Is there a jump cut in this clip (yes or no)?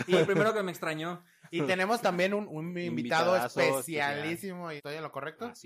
yes